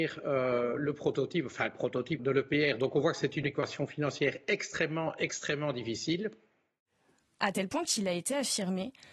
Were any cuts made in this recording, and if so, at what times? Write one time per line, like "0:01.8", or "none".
0:02.2
0:07.4